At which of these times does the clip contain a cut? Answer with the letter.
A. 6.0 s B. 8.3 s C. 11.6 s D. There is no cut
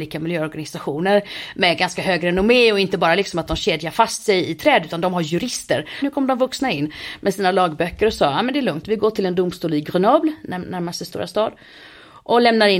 D